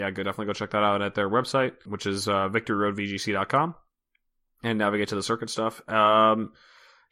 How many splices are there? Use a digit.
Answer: 1